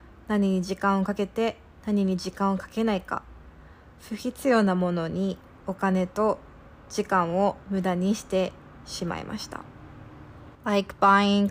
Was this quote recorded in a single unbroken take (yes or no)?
no